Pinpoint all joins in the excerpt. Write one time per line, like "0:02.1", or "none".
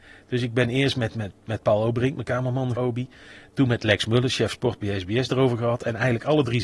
0:02.7